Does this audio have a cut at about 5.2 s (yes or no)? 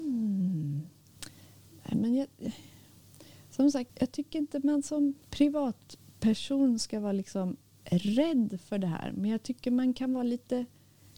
yes